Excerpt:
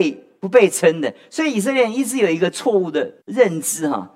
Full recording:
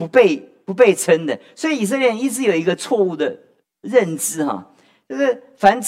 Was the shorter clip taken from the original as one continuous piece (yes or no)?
no